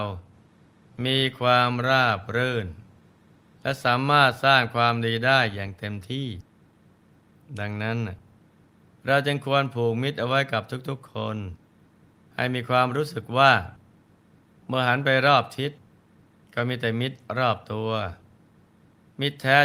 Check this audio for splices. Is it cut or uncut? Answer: uncut